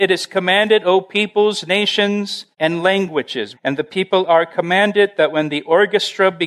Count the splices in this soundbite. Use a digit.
2